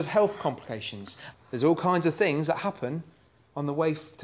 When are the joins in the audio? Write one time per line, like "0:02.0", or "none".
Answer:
0:01.3